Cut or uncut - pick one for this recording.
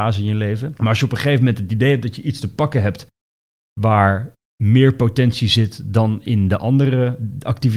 uncut